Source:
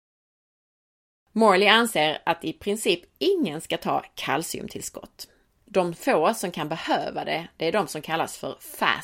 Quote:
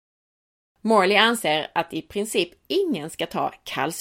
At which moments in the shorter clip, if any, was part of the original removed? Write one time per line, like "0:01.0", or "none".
none